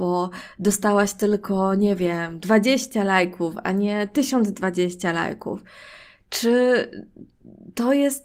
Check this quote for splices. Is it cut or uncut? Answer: uncut